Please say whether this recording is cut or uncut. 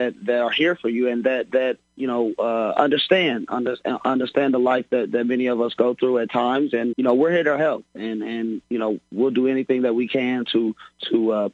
cut